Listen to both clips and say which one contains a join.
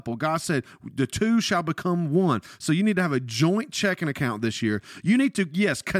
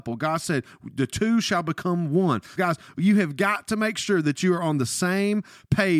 second; 1 cut; at 2.6 s

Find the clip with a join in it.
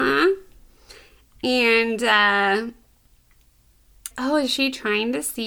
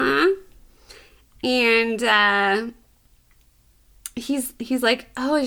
first; 1 cut; at 4.1 s

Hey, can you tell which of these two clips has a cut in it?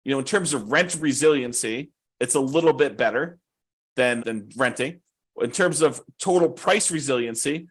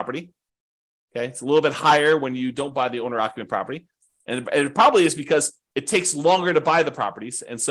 first; 1 cut; at 4.2 s

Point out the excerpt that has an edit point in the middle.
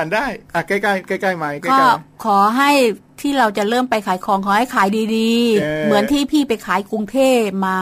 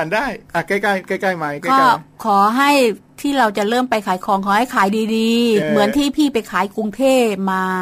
second; 1 cut; at 5.6 s

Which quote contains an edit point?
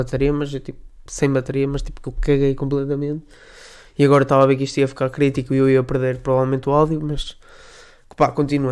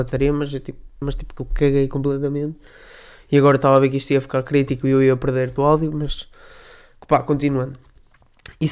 second; 2 cuts; at 1.0 s, 5.6 s

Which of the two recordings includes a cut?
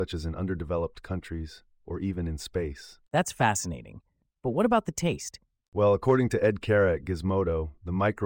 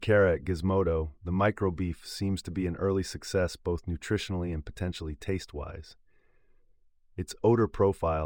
first; 2 cuts; at 1.8 s, 5.6 s

